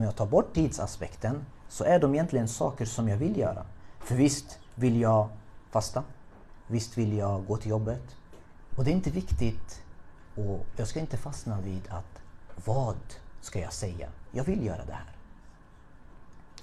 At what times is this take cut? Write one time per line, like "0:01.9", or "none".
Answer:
0:08.7
0:14.2